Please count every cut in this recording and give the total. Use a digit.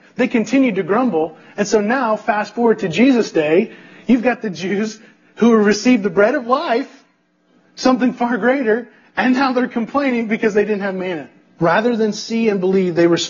1